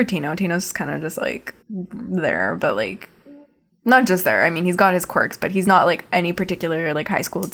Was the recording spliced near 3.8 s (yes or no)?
no